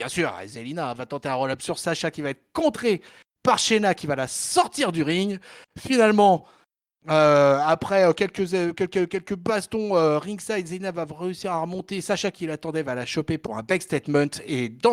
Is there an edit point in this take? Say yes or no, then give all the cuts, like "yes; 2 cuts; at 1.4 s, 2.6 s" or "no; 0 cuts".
no; 0 cuts